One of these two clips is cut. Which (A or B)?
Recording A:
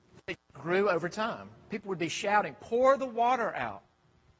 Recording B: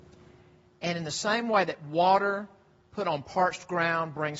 A